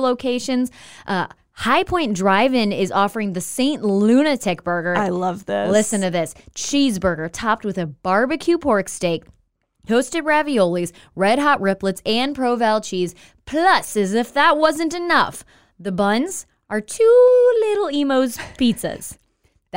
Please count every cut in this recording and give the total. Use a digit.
0